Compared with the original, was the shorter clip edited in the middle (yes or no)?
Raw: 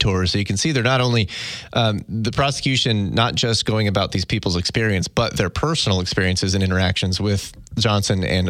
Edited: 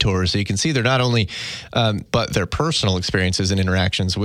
yes